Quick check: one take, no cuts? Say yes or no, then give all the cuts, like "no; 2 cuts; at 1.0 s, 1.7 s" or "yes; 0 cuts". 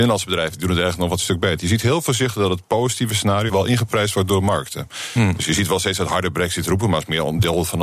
no; 1 cut; at 3.5 s